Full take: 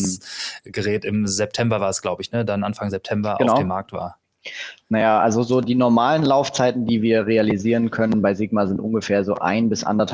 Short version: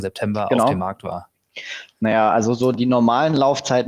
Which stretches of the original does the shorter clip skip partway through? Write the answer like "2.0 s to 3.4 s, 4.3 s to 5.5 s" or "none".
none